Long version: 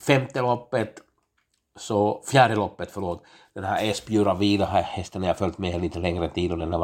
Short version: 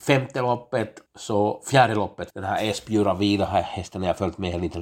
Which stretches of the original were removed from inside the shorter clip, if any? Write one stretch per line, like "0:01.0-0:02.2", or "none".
0:01.1-0:01.7
0:02.9-0:03.5